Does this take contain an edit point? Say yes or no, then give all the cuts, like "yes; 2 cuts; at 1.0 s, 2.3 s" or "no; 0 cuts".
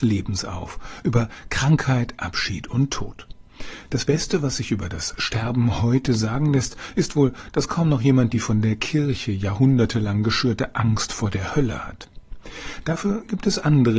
no; 0 cuts